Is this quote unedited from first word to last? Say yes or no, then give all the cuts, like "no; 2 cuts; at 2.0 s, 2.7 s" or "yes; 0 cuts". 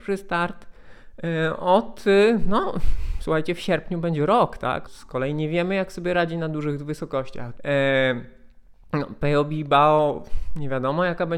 no; 2 cuts; at 4.9 s, 7.6 s